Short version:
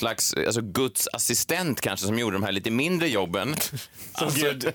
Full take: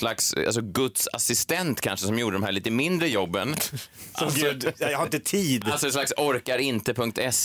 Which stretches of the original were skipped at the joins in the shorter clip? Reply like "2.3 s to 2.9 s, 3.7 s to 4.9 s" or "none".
none

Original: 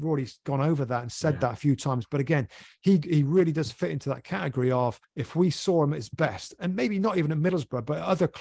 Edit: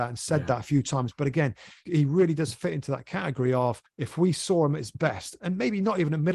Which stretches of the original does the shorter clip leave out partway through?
2.8 s to 3.0 s

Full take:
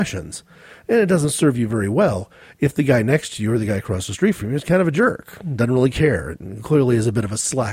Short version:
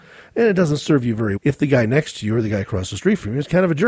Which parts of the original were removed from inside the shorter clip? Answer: 1.9 s to 2.5 s

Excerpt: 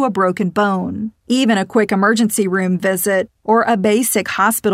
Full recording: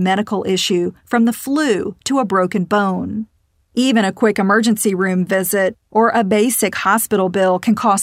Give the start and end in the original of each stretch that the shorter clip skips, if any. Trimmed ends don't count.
3.3 s to 3.6 s

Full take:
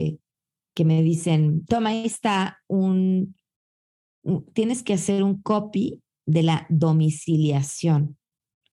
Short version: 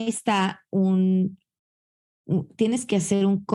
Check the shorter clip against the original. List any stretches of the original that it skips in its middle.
none

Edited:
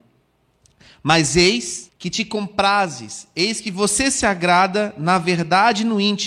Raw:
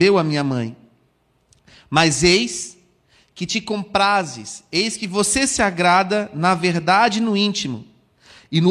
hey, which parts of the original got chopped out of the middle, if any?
2.8 s to 3.2 s

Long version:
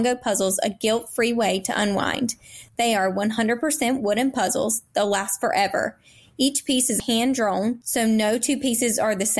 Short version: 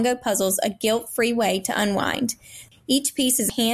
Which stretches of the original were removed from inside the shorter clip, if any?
2.7 s to 6.2 s

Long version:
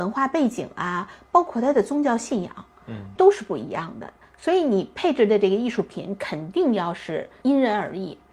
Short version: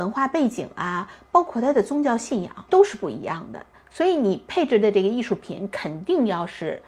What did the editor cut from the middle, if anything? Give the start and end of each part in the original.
2.7 s to 3.2 s

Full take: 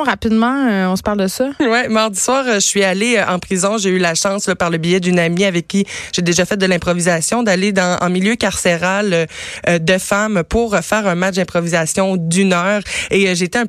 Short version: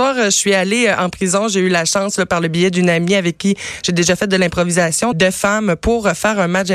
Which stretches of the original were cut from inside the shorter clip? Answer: 7.4 s to 9.8 s

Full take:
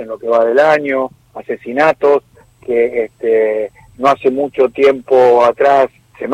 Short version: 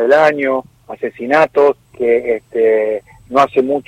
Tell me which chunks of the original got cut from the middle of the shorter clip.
2.3 s to 2.5 s

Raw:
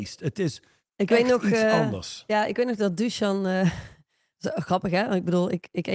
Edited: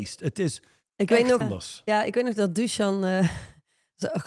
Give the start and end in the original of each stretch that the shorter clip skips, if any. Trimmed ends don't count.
1.4 s to 1.8 s

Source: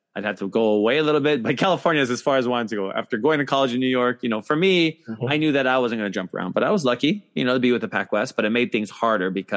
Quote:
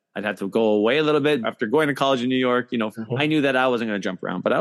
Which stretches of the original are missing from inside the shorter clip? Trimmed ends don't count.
1.4 s to 2.9 s, 4.4 s to 5.0 s

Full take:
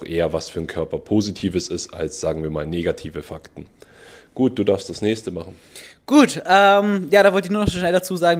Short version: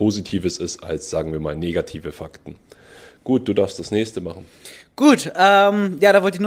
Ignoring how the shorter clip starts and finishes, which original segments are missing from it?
none

